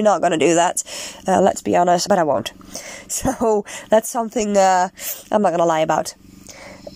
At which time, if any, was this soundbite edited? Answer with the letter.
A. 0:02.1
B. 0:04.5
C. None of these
A